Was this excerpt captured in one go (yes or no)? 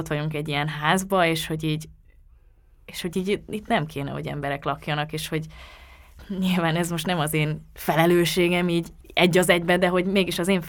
yes